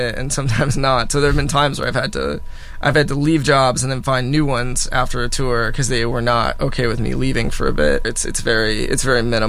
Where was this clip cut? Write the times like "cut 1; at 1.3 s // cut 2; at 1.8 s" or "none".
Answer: cut 1; at 8.0 s